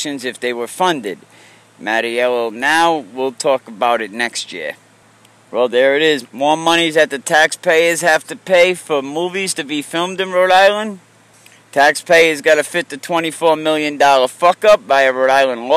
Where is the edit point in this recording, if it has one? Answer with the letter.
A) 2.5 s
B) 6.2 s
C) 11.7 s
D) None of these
B